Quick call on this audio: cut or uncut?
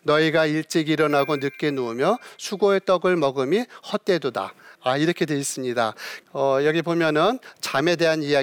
cut